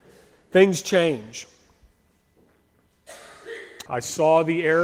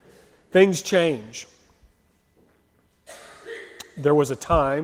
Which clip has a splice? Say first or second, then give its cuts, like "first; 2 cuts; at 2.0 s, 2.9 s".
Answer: first; 1 cut; at 3.9 s